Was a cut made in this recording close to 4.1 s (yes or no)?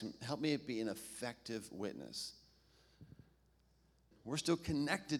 yes